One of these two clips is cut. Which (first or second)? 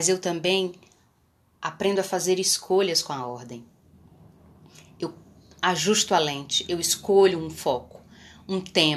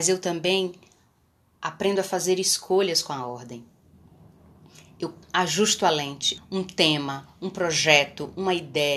second